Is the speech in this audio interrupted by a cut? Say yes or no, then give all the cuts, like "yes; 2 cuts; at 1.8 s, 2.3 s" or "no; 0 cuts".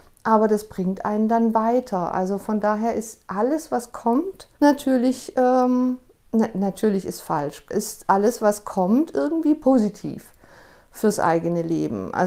yes; 2 cuts; at 4.5 s, 7.7 s